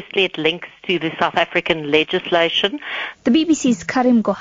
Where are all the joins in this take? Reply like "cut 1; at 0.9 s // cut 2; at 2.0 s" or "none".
cut 1; at 3.1 s

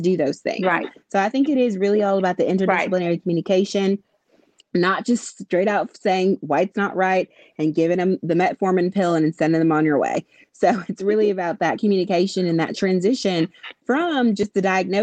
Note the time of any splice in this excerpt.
none

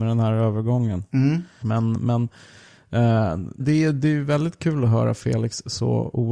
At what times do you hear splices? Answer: cut 1; at 1.6 s // cut 2; at 3.6 s

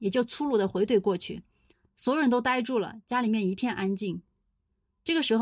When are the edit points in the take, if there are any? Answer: cut 1; at 1.9 s

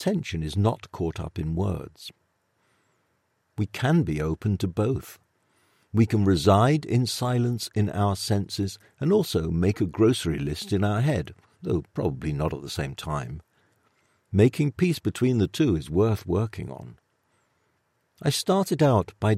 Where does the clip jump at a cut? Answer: cut 1; at 3.5 s

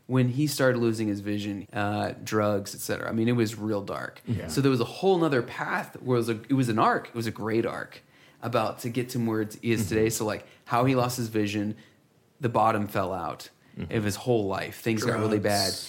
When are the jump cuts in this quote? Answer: cut 1; at 1.6 s

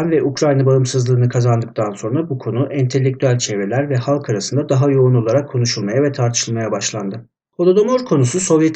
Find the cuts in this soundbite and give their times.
cut 1; at 7.5 s

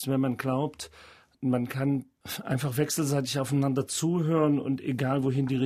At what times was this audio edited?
none

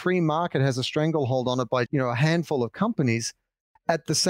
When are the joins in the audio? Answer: cut 1; at 1.9 s

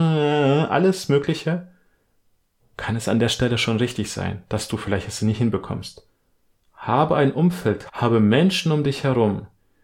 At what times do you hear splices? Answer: cut 1; at 6.6 s // cut 2; at 7.9 s

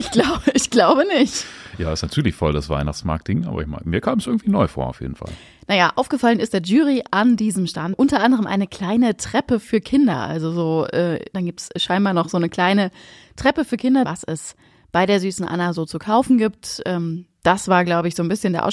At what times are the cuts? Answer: cut 1; at 7.9 s // cut 2; at 11.3 s // cut 3; at 14.0 s

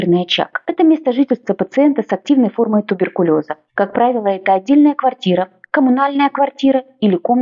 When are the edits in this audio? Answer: cut 1; at 3.7 s

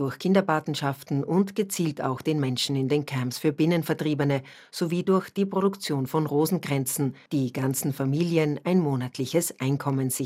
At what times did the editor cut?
none

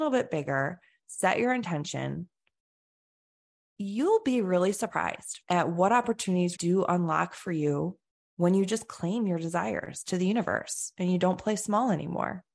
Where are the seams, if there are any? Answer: cut 1; at 3.6 s // cut 2; at 5.4 s // cut 3; at 6.6 s

